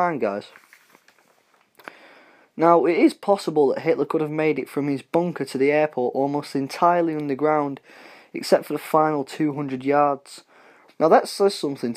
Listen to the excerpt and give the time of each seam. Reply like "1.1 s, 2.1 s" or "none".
10.9 s